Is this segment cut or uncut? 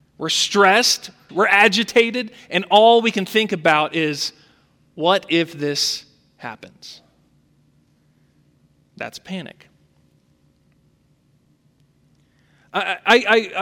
cut